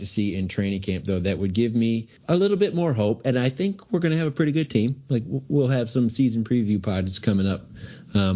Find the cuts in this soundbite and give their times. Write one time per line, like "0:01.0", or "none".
0:02.2